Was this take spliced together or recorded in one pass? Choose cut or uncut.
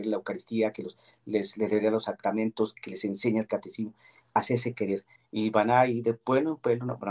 cut